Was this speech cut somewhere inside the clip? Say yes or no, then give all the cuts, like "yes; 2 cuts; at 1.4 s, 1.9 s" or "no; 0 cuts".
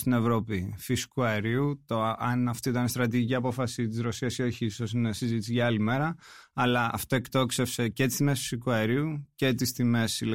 no; 0 cuts